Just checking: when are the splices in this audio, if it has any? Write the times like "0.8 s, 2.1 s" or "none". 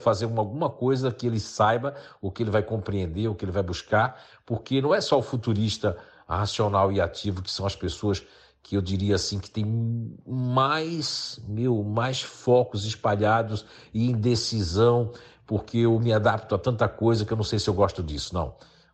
none